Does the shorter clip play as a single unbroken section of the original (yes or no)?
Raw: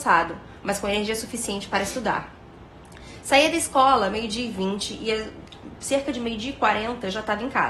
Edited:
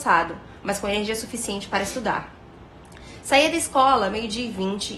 yes